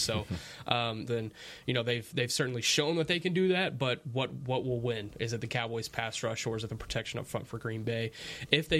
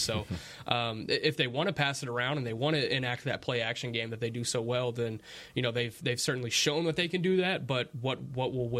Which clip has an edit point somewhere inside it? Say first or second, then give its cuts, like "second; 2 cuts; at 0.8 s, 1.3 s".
first; 1 cut; at 1.1 s